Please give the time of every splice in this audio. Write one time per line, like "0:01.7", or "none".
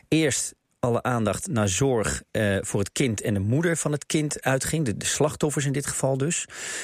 none